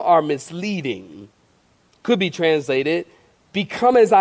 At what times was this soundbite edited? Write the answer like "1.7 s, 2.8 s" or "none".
1.9 s